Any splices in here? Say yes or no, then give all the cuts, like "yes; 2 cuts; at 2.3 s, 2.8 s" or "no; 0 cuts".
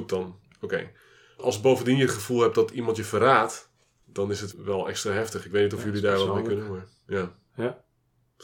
yes; 1 cut; at 4.0 s